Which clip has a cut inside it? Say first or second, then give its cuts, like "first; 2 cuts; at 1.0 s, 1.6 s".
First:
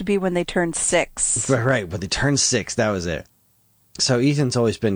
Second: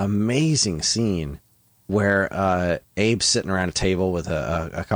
first; 1 cut; at 3.8 s